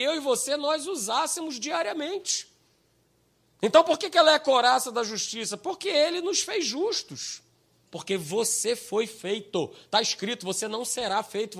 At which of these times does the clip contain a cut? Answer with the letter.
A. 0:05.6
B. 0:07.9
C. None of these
B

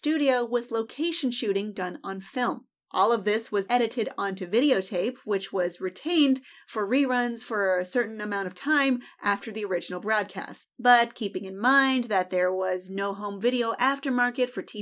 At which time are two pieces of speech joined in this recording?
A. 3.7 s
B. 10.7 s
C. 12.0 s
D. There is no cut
A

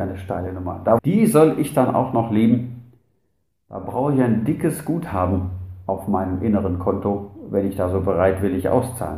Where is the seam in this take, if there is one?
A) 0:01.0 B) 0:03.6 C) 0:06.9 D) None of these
A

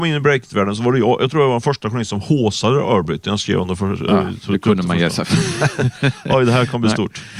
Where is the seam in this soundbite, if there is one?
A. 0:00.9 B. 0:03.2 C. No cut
C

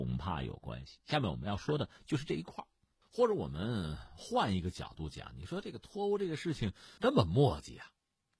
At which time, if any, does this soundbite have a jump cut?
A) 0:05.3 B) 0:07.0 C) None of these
B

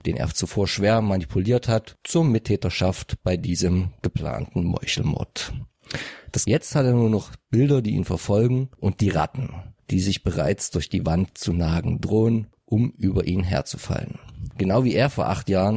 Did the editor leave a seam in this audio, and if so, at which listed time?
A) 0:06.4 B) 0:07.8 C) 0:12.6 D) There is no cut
A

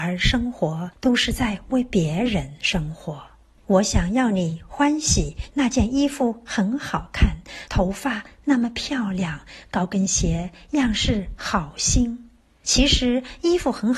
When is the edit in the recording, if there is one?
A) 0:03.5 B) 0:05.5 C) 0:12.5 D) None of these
B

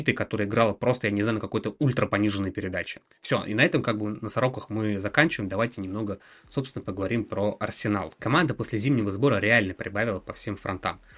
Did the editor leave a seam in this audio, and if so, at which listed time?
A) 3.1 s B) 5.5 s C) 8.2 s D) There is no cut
D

